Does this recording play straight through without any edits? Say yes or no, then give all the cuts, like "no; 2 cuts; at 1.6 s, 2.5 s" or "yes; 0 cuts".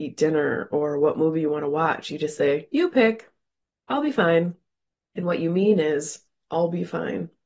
yes; 0 cuts